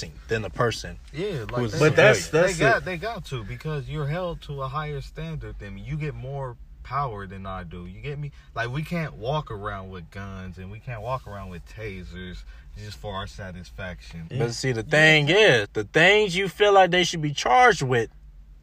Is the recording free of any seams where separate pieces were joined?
no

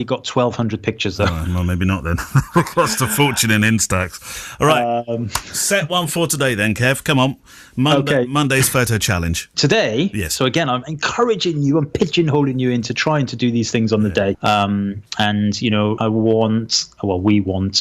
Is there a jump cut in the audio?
yes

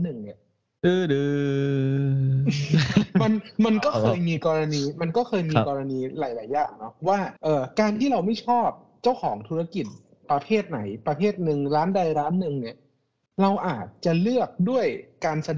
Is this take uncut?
no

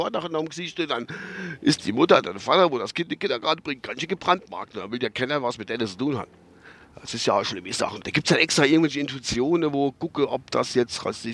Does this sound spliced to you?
yes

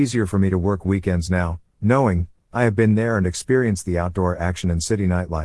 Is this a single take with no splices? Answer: yes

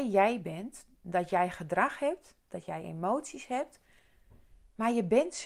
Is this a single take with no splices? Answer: no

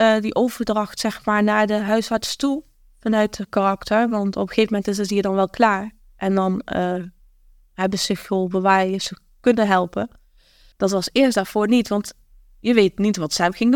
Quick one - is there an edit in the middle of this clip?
yes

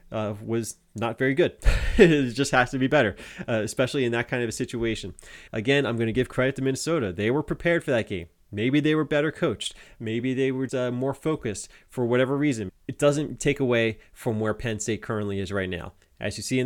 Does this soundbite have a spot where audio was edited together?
yes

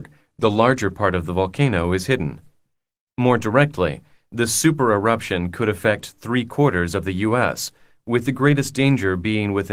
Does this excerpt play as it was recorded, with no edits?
no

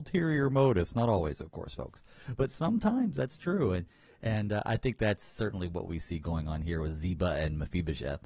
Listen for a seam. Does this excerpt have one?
no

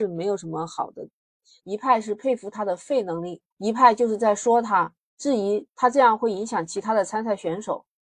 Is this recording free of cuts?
no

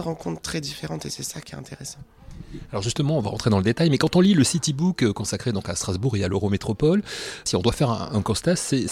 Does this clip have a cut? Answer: no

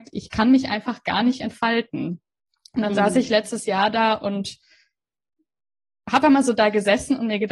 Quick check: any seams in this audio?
yes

